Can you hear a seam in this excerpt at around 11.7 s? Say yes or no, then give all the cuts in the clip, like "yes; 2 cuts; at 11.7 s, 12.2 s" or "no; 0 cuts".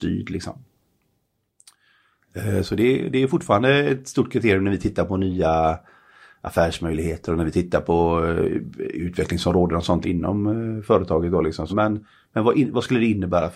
yes; 2 cuts; at 10.0 s, 11.7 s